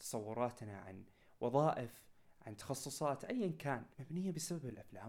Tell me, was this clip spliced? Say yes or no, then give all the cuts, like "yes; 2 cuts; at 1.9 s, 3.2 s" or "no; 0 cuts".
yes; 1 cut; at 3.9 s